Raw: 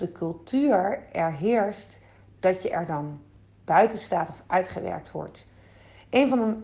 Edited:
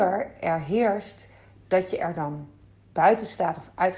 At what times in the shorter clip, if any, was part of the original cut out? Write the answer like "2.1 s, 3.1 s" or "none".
none